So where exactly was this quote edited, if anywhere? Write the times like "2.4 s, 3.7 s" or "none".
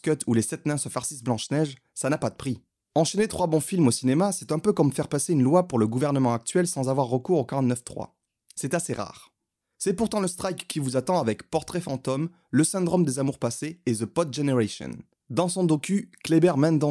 none